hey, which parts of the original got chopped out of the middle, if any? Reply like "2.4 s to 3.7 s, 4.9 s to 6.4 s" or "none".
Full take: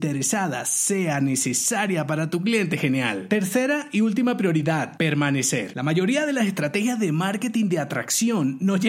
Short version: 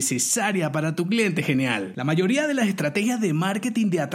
3.3 s to 5.7 s